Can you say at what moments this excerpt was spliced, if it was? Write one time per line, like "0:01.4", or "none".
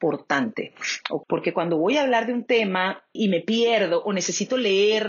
0:01.2
0:03.2